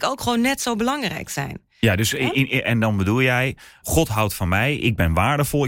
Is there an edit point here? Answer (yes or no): yes